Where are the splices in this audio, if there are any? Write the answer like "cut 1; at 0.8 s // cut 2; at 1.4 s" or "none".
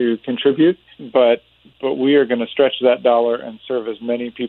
cut 1; at 0.9 s